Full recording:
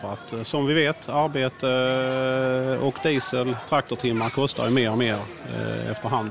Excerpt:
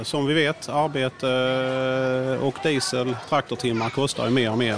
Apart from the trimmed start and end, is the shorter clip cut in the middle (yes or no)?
no